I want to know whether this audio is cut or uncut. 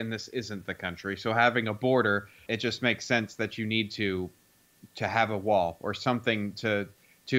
cut